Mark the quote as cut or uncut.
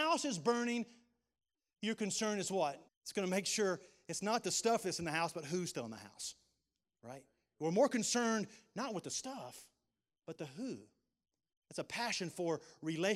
cut